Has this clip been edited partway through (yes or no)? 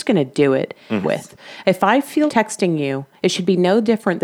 yes